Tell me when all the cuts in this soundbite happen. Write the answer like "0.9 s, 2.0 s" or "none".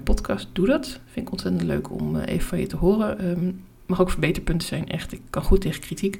none